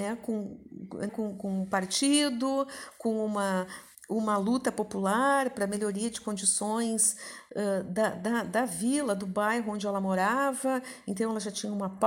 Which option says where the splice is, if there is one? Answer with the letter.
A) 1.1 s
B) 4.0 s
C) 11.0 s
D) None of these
A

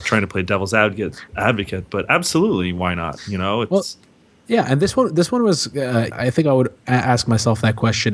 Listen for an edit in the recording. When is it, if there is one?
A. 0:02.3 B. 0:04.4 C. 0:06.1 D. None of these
C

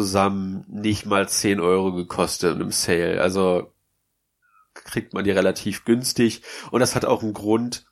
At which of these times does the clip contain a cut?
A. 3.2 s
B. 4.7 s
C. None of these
B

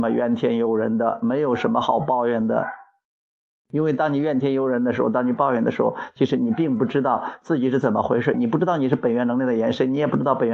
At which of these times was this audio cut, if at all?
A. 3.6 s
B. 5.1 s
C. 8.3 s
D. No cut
C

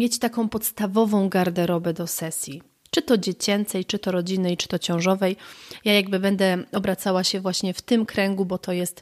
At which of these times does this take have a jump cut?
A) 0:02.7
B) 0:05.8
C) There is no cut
C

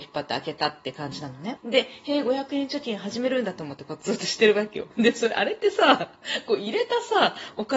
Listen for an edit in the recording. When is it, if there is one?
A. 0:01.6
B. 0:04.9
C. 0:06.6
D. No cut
A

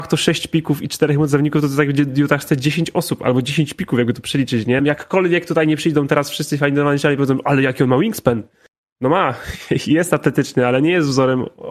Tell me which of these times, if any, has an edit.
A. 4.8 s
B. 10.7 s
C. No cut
A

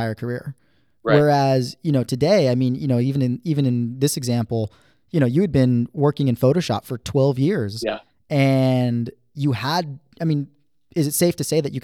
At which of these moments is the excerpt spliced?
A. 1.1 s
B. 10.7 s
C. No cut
C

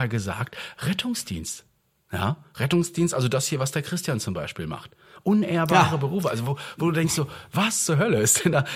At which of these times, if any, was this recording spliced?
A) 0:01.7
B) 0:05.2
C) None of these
C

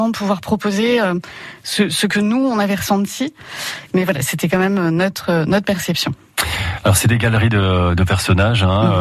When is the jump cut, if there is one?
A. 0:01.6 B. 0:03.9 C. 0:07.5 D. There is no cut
B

